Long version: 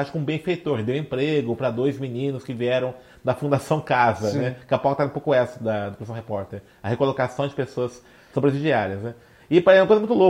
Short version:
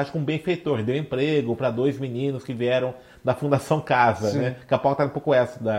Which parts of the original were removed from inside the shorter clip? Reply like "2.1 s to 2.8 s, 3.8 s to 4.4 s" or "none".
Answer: none